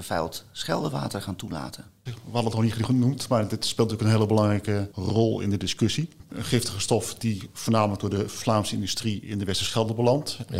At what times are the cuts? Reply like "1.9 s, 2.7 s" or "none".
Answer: 2.1 s, 6.3 s

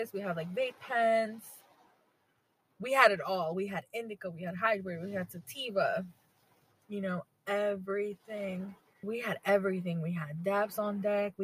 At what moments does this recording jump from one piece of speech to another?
9.0 s

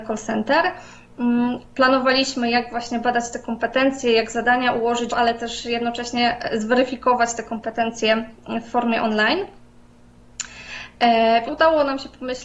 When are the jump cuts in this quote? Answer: 1.6 s, 5.1 s, 11.5 s

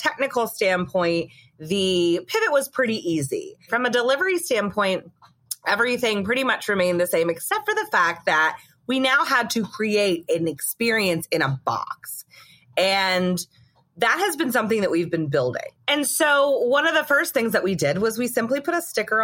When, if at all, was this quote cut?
none

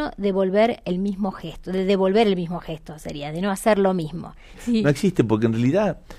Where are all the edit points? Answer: 4.5 s

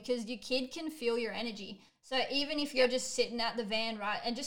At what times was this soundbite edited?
none

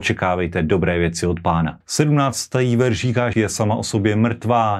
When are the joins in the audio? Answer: 1.8 s, 3.3 s

